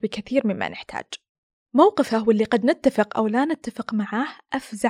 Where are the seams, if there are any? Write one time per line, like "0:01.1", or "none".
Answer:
none